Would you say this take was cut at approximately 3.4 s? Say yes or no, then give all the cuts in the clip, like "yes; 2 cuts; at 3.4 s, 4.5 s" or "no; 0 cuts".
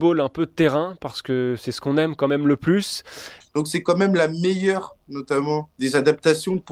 yes; 1 cut; at 3.4 s